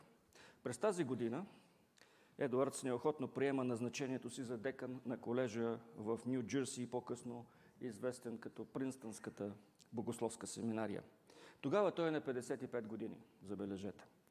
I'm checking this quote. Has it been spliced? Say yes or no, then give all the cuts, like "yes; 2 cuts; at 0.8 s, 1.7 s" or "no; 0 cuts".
no; 0 cuts